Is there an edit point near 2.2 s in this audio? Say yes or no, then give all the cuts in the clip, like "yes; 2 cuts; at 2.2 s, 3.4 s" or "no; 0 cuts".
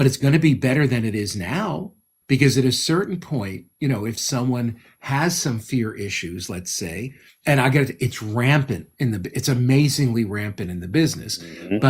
no; 0 cuts